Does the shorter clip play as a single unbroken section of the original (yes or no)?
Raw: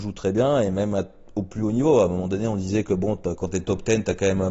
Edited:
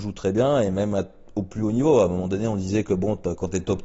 yes